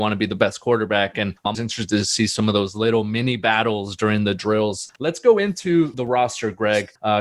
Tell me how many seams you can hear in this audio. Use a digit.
2